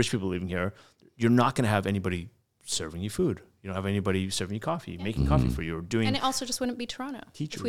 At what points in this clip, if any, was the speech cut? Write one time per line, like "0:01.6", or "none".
none